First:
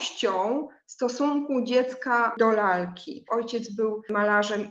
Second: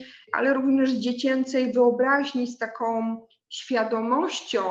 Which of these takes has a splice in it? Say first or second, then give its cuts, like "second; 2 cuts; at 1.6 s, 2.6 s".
first; 1 cut; at 3.3 s